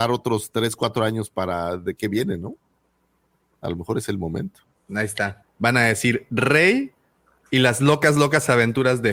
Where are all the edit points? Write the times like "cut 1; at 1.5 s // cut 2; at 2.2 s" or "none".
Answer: cut 1; at 5.4 s